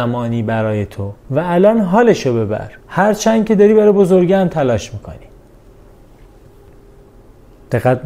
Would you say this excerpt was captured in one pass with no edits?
no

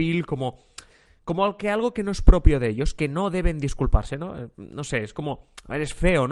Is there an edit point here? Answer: no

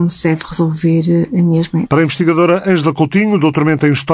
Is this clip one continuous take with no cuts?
no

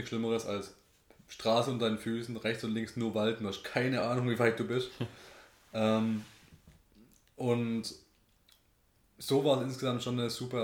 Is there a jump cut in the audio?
no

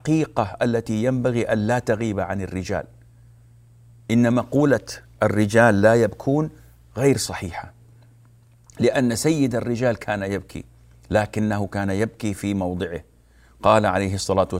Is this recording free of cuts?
yes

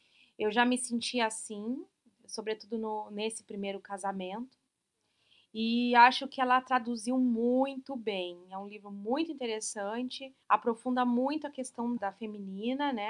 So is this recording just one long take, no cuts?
no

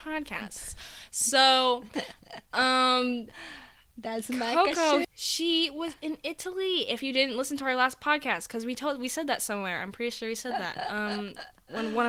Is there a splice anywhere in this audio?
yes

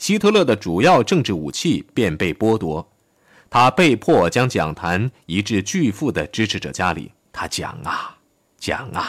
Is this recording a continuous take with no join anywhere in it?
no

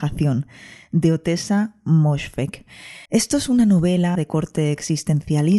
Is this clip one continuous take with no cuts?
no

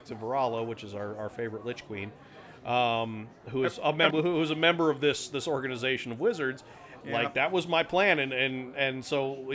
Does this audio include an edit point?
yes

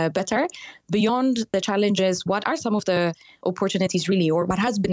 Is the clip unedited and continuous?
yes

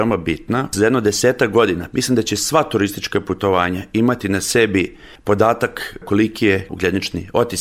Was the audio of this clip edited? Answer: yes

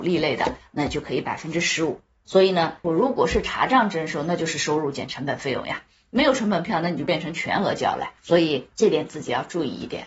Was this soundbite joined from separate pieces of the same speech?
yes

